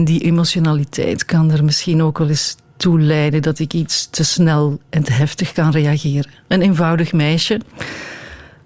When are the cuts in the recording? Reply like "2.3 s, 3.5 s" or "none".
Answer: 6.5 s